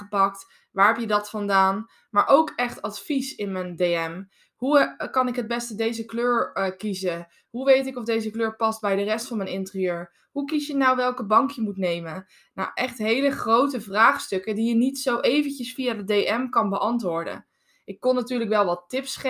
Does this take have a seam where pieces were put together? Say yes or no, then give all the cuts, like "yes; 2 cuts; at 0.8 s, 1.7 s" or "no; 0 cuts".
no; 0 cuts